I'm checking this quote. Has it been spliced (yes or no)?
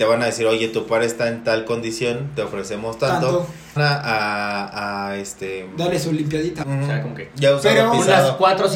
yes